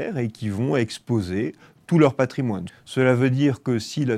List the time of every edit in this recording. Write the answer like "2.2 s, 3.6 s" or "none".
2.7 s